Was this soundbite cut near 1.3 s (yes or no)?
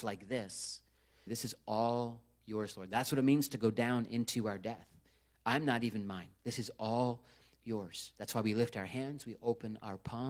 yes